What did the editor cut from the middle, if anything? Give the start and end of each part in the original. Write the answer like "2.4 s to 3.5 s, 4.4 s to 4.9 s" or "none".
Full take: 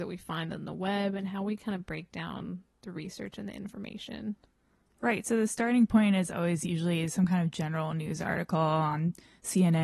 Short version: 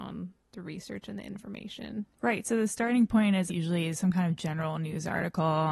4.4 s to 4.9 s, 6.3 s to 6.6 s